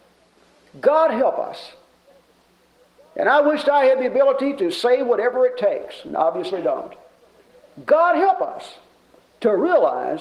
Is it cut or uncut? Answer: uncut